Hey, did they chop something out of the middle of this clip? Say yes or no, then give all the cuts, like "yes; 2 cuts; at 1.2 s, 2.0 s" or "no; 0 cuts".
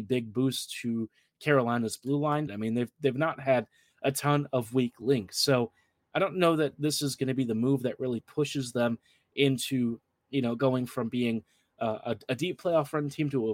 yes; 1 cut; at 2.5 s